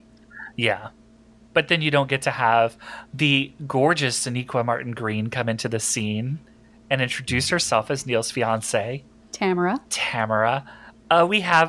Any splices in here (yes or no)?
yes